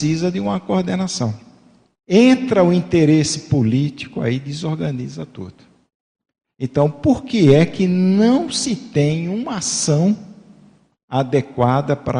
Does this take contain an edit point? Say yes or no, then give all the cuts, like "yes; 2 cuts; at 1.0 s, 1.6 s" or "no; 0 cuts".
yes; 1 cut; at 2.0 s